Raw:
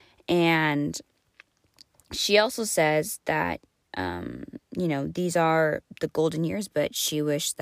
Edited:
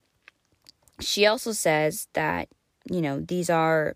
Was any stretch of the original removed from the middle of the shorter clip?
yes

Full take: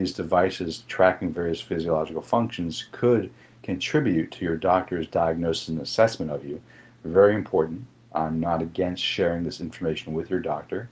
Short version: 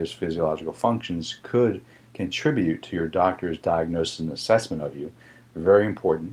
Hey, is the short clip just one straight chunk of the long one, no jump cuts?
yes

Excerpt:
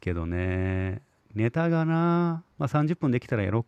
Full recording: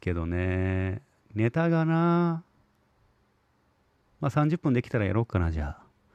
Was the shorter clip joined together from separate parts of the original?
yes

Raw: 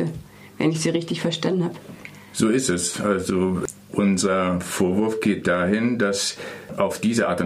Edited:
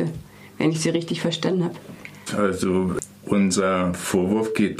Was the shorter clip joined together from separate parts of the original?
yes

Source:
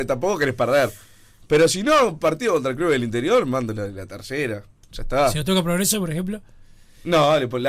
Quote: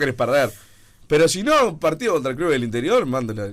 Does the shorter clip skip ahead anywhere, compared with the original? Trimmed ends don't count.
no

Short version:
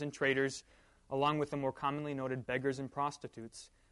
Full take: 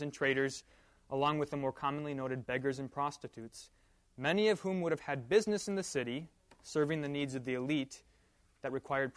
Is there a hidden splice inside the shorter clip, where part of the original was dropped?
no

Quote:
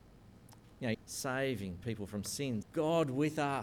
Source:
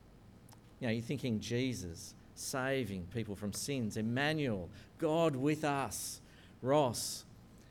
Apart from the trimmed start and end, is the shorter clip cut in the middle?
yes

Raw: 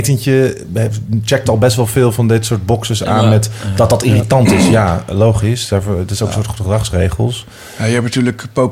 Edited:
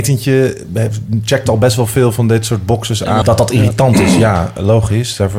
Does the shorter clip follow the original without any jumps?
no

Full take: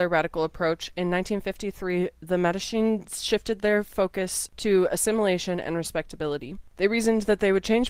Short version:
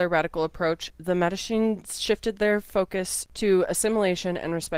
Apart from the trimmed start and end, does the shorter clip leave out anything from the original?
yes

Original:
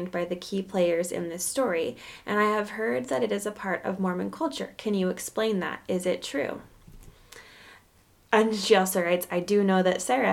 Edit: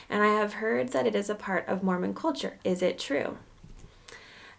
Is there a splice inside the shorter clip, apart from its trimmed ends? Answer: yes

